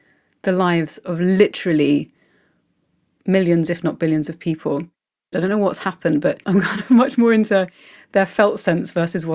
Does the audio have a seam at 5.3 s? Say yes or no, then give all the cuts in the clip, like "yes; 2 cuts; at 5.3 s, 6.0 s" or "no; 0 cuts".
yes; 2 cuts; at 5.3 s, 6.4 s